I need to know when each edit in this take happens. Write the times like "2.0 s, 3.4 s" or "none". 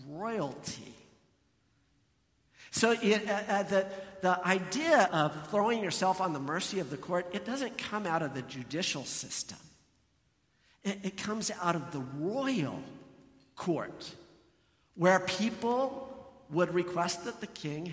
5.1 s

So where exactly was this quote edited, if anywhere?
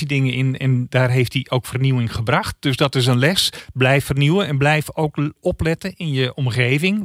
none

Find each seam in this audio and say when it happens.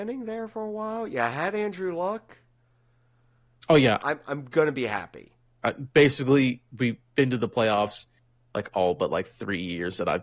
4.0 s, 5.6 s

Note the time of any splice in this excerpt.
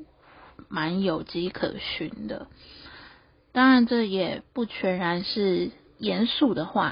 none

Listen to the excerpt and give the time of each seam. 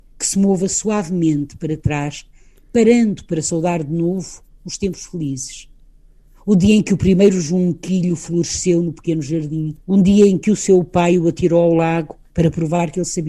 6.2 s, 9.8 s, 12.3 s

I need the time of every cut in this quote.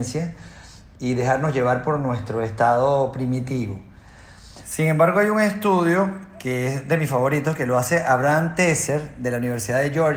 none

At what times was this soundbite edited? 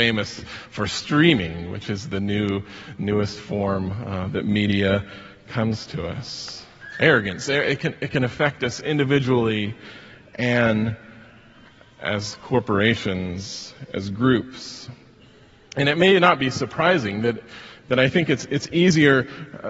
none

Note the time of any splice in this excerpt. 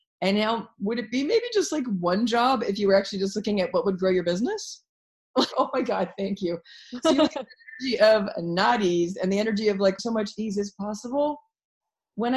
5.5 s, 10.0 s

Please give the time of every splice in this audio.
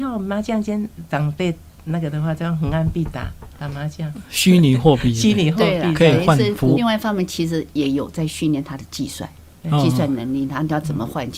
6.7 s

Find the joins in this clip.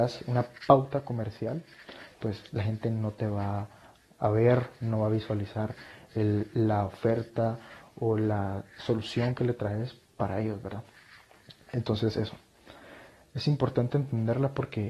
none

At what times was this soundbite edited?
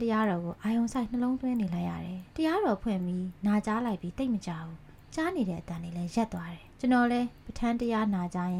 2.3 s, 6.7 s

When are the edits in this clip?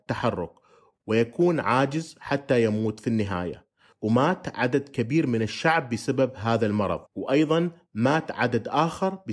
7.1 s

